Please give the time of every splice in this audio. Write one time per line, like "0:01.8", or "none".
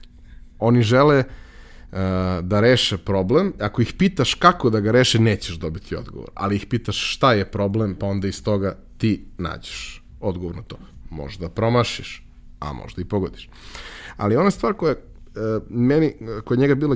none